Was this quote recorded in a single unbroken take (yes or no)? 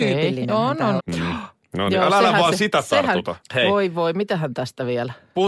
no